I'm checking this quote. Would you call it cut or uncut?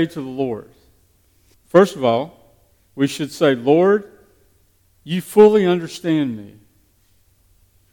cut